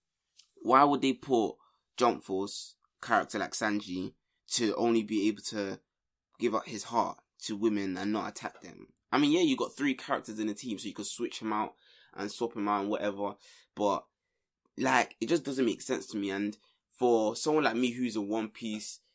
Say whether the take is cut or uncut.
uncut